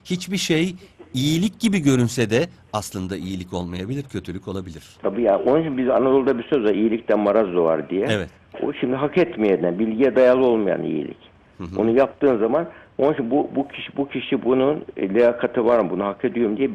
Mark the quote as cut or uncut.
uncut